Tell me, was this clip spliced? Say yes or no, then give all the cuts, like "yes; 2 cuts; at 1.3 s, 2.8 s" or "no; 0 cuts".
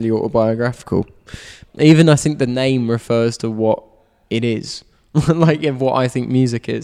yes; 1 cut; at 1.7 s